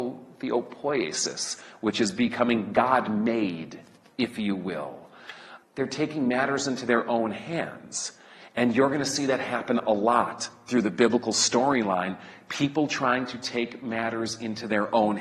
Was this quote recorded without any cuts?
no; 1 cut; at 5.6 s

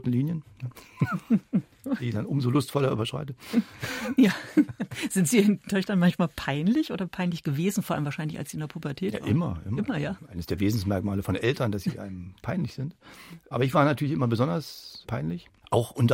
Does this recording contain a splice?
no; 0 cuts

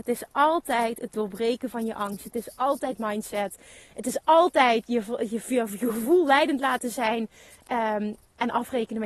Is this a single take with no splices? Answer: yes; 0 cuts

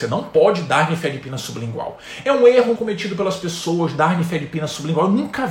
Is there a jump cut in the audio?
yes; 1 cut; at 2.8 s

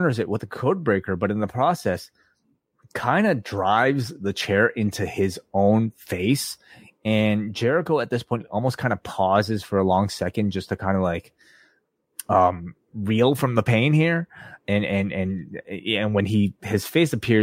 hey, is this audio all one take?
yes; 0 cuts

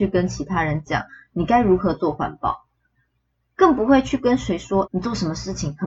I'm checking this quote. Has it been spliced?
yes; 1 cut; at 4.8 s

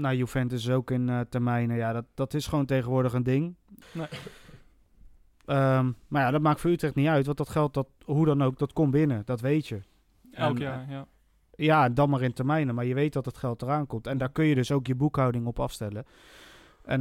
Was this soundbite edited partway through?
yes; 1 cut; at 3.8 s

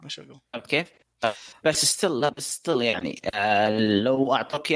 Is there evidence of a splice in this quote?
yes; 1 cut; at 1.6 s

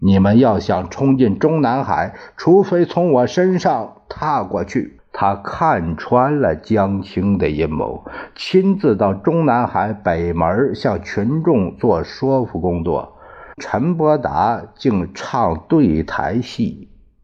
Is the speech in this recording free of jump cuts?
no; 2 cuts; at 5.0 s, 13.6 s

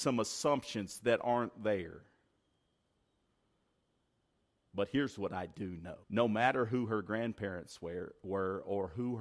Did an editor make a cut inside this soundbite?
yes; 1 cut; at 6.0 s

